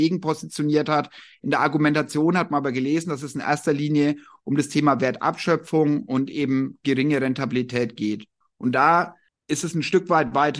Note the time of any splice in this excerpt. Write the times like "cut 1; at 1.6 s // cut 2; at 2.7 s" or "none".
none